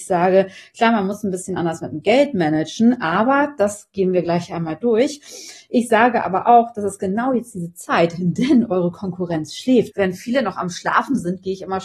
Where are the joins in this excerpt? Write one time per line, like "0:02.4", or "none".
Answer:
0:09.9